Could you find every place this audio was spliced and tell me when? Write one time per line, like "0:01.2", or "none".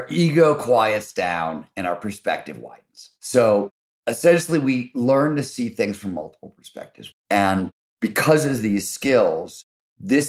0:03.2
0:07.1